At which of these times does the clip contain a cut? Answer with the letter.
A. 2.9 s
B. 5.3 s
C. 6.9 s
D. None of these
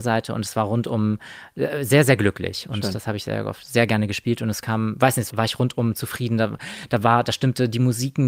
B